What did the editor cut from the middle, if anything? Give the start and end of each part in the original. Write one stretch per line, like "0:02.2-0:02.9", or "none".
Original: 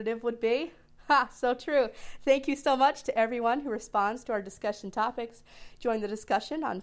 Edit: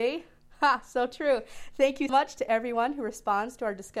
0:02.6-0:02.8

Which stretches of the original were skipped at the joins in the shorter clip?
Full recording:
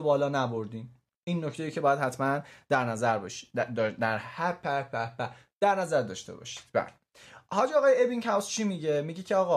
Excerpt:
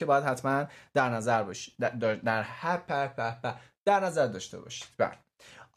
none

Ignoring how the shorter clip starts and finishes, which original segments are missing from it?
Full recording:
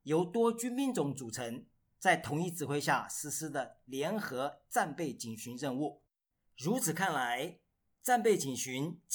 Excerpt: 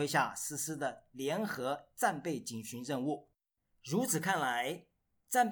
none

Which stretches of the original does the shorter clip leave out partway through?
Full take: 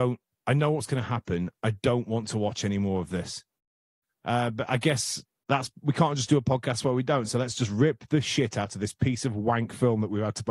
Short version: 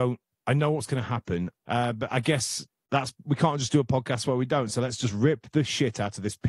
0:01.6-0:04.1

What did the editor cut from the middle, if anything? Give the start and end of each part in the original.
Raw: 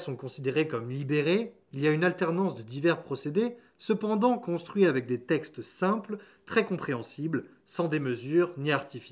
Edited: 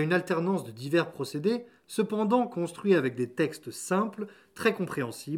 none

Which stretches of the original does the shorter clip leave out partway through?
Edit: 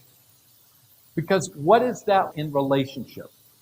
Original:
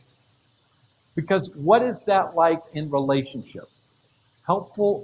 0:02.3-0:02.7

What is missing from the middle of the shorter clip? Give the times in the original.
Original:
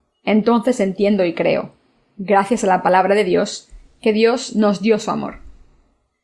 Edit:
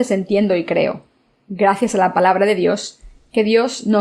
none

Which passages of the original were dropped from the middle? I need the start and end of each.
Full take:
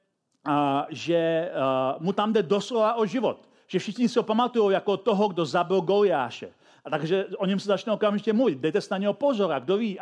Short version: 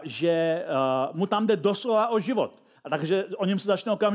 0:03.6-0:06.8

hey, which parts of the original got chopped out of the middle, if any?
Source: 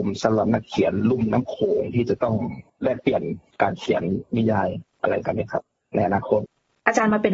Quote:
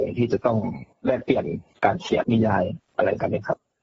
0:04.0-0:04.3

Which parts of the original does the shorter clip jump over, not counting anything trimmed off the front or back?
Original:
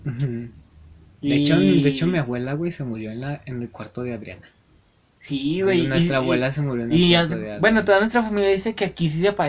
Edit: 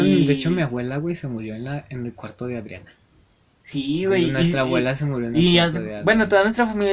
none

